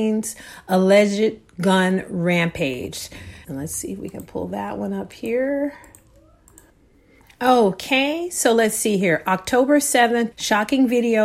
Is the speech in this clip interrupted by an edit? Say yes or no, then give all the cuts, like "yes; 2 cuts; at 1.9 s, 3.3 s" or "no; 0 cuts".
yes; 2 cuts; at 3.4 s, 10.3 s